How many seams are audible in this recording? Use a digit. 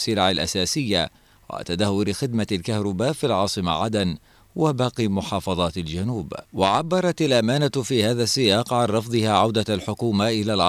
1